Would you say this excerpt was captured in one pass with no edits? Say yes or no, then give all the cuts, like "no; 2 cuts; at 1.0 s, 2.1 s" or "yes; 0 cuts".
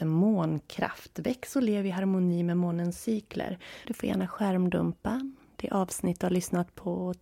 no; 1 cut; at 3.8 s